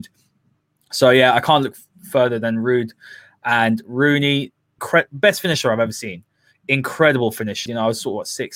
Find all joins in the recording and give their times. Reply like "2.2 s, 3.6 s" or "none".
4.8 s, 7.7 s